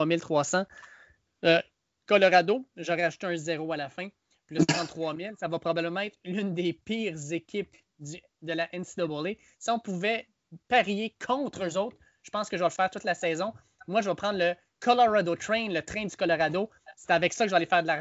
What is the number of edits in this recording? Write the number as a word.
zero